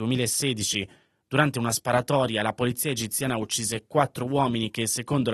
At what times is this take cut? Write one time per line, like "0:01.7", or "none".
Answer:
none